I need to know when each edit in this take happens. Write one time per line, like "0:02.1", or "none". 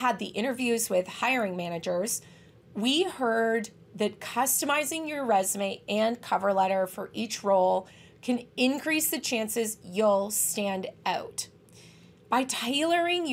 none